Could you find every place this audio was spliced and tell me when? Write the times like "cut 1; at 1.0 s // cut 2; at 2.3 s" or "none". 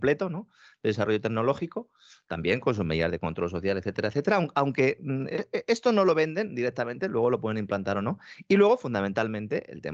none